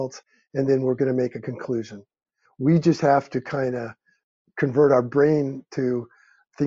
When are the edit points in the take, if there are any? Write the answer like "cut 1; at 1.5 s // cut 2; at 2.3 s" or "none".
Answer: cut 1; at 2.5 s